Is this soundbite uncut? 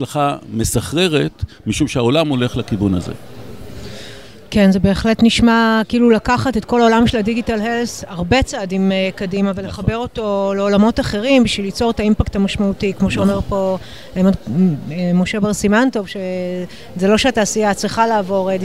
yes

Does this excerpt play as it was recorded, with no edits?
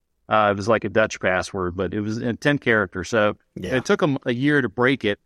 yes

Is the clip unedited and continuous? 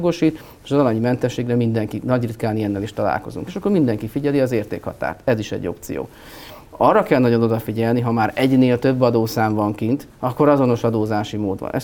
yes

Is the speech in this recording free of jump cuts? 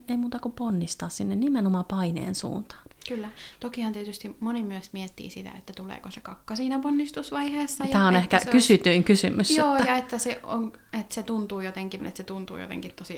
no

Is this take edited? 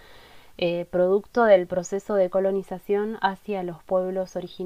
no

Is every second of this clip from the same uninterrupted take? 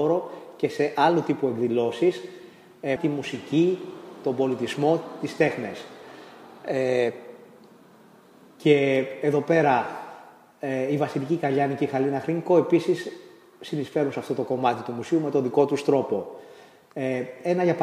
no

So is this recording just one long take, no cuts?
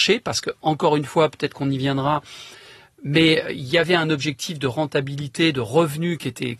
yes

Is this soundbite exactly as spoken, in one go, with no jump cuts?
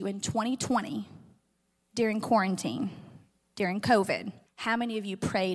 no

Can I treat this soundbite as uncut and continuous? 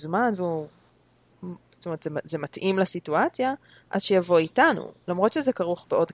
yes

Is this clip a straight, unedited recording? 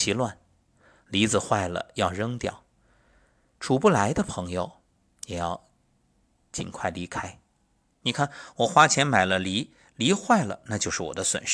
no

